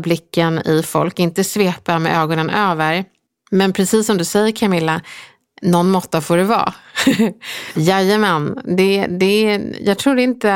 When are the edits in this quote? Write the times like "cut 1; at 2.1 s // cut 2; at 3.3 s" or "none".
cut 1; at 7.8 s